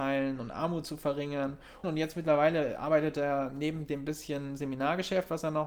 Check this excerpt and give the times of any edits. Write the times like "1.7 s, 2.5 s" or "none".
1.8 s